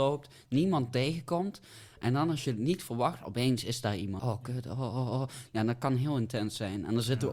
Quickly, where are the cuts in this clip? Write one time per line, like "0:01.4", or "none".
0:04.2
0:05.5